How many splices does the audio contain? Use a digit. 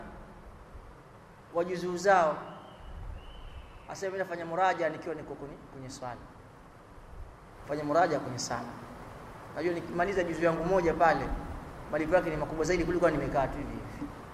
0